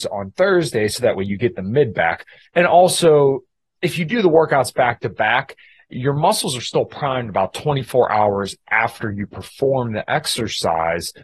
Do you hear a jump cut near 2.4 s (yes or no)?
yes